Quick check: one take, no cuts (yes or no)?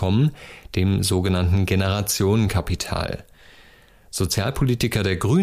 yes